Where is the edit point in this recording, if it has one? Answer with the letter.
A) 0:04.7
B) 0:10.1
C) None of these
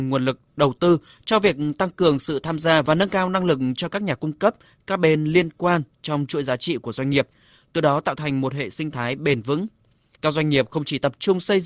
B